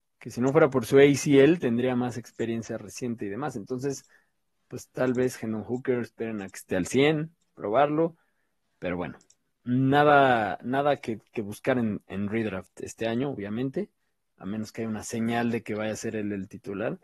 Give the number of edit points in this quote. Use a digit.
0